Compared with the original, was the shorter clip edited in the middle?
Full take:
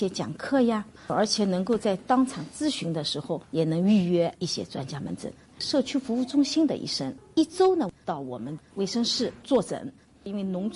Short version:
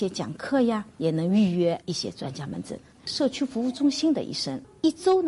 yes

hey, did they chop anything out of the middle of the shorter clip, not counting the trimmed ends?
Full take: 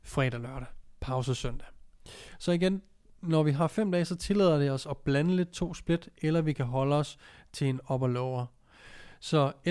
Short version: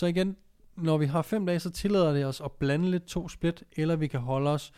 no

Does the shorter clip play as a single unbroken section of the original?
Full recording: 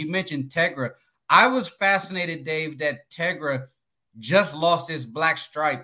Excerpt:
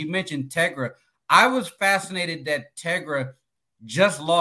no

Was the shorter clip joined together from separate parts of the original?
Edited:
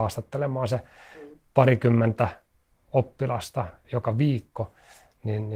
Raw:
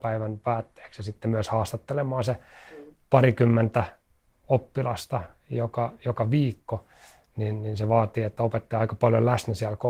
yes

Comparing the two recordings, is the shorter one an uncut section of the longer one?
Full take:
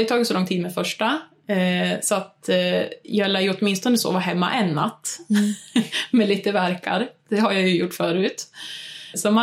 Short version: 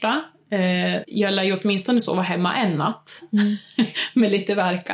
no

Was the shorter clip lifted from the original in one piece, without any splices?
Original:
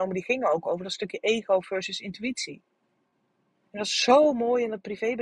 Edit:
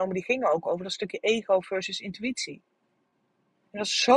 yes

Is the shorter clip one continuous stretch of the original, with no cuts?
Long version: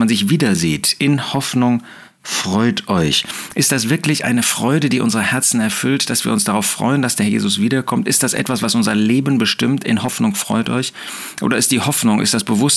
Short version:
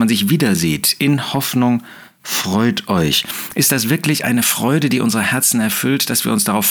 yes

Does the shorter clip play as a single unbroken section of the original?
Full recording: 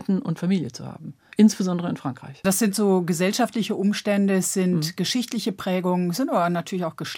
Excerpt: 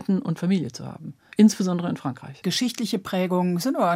no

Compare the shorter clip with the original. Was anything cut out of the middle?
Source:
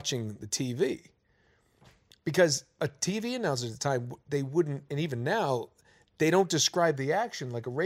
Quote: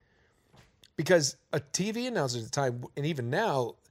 yes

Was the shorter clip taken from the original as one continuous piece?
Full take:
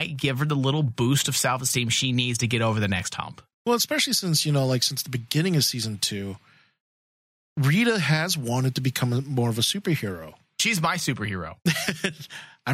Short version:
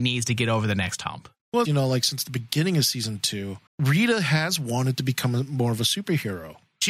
no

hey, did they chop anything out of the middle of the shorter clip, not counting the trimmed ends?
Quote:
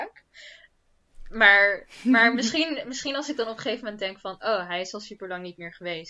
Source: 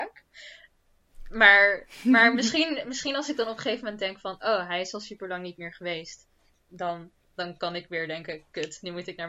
no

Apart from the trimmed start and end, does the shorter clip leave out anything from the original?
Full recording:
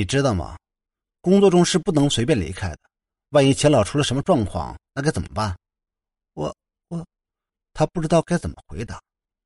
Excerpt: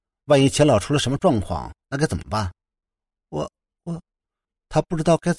no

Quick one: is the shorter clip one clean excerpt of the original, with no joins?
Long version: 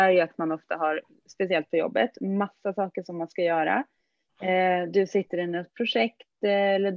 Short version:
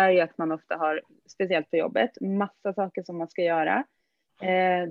yes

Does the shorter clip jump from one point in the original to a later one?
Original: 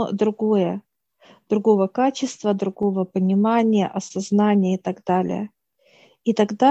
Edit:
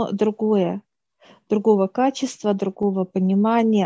no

